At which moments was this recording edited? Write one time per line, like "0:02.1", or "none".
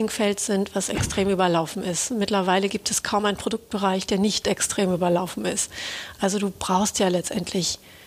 none

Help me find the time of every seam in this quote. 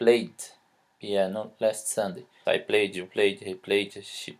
0:02.4

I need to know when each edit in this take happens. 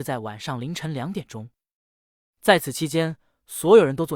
none

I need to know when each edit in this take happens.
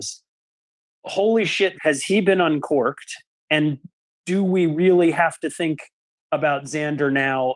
0:01.7

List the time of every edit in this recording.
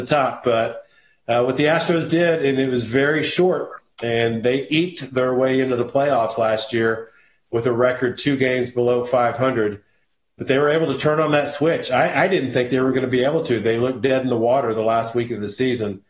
none

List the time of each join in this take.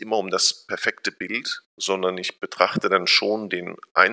none

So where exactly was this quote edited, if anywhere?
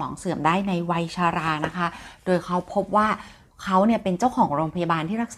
none

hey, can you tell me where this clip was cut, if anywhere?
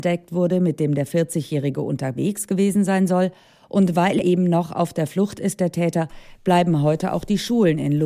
0:04.2

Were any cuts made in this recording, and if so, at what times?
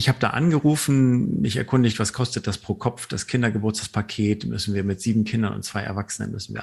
none

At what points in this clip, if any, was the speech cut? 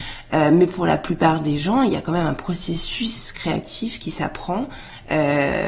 none

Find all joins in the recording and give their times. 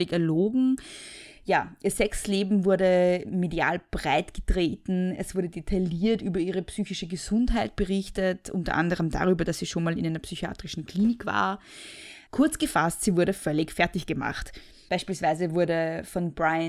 0:12.3
0:14.9

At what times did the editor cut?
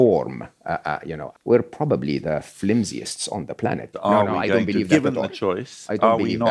0:01.3
0:03.9

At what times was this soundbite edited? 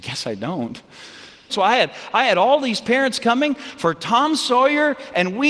0:01.5

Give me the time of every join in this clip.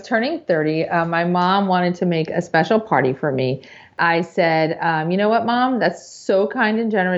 none

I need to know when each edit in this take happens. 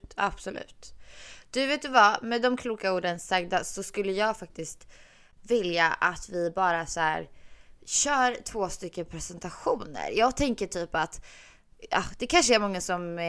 none

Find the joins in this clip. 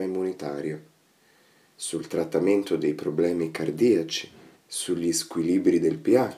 0:04.5

